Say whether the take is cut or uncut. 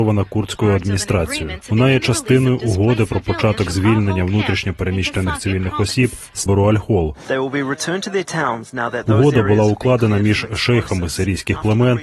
cut